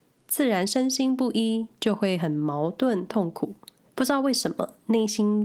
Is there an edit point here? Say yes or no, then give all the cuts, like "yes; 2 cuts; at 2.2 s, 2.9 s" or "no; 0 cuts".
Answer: yes; 1 cut; at 3.8 s